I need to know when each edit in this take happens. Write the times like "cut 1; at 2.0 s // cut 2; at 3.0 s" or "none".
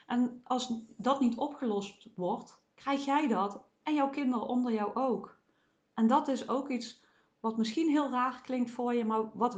cut 1; at 2.7 s // cut 2; at 5.8 s